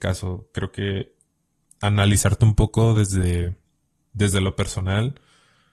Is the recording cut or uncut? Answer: uncut